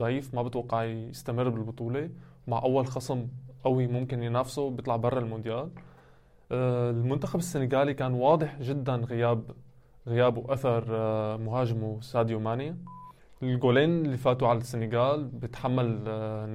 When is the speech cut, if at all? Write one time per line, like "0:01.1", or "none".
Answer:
none